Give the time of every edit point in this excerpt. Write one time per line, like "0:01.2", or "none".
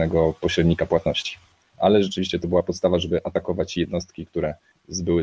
0:01.6